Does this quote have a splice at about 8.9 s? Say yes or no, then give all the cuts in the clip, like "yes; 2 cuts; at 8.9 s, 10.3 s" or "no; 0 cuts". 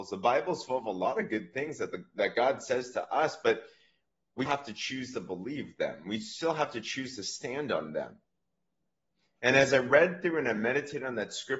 no; 1 cut; at 4.5 s